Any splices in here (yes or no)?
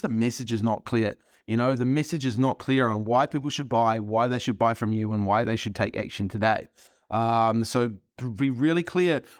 no